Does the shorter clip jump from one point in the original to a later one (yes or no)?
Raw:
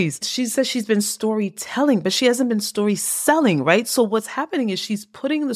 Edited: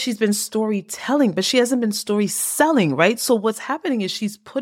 no